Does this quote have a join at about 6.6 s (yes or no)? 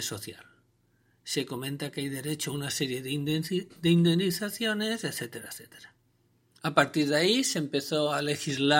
yes